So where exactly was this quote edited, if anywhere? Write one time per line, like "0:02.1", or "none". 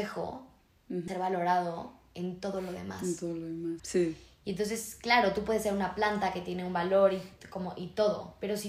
0:01.1
0:03.8